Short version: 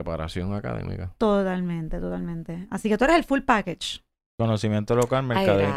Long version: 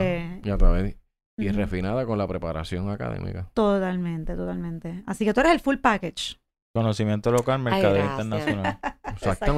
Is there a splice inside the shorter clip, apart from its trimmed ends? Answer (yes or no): no